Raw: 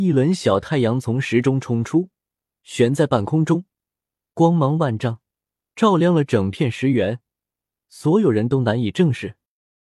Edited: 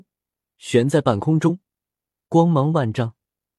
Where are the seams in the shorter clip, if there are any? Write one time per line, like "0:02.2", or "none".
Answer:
none